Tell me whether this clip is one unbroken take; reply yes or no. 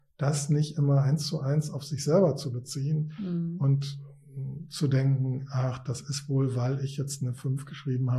yes